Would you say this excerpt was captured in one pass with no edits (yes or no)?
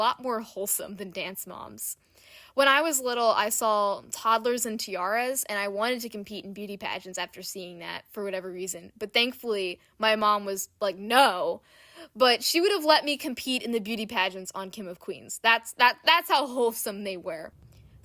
yes